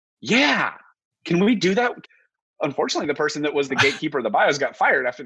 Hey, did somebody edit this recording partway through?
yes; 2 cuts; at 2.0 s, 3.7 s

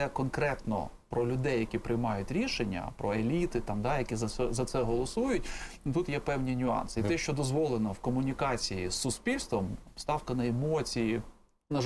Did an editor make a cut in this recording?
no; 0 cuts

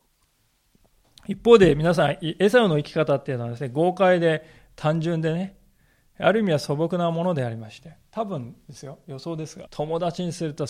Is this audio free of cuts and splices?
no; 1 cut; at 9.7 s

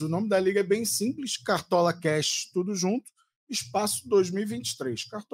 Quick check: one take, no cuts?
yes; 0 cuts

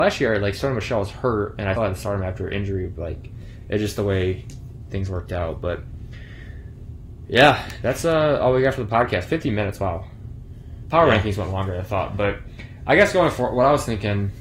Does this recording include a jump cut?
yes; 1 cut; at 1.8 s

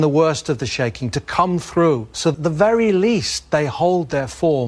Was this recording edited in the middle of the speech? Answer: no; 0 cuts

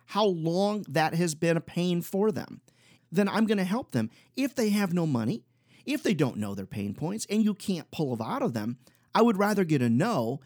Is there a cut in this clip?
yes; 1 cut; at 3.0 s

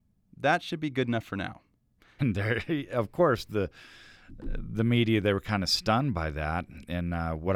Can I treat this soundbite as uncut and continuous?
no; 1 cut; at 2.2 s

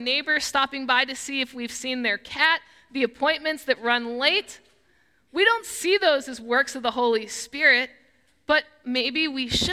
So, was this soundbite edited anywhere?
no; 0 cuts

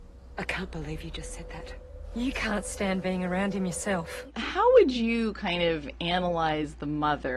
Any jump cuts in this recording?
no; 0 cuts

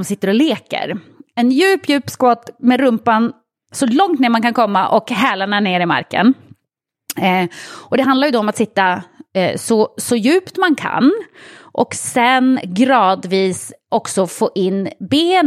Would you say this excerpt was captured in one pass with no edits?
yes; 0 cuts

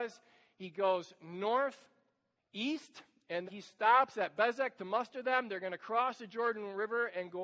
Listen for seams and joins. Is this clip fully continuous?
no; 2 cuts; at 2.4 s, 3.5 s

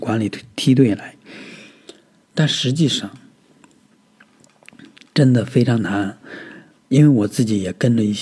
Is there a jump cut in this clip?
no; 0 cuts

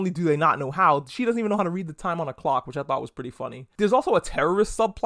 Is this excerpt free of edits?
yes; 0 cuts

